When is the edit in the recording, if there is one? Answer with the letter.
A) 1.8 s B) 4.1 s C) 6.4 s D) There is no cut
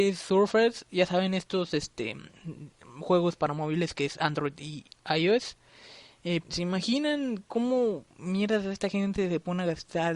C